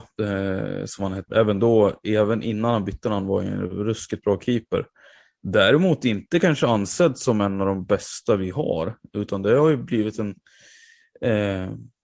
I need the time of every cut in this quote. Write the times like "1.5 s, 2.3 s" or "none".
none